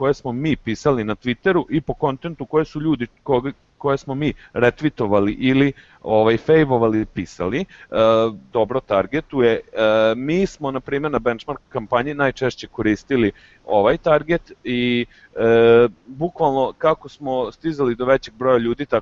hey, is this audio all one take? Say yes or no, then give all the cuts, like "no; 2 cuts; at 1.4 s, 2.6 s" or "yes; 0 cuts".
no; 1 cut; at 8.5 s